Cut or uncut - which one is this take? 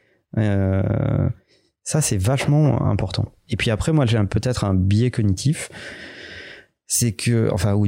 uncut